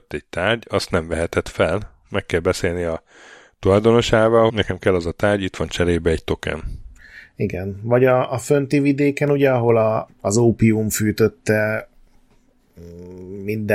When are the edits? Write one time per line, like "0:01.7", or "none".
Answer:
0:04.5
0:10.1